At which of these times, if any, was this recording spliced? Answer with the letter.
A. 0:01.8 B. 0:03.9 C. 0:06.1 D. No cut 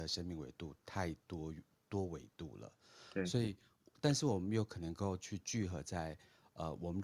A